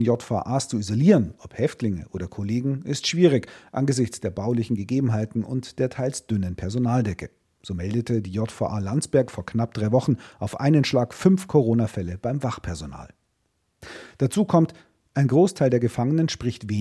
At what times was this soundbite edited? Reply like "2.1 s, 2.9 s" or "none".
none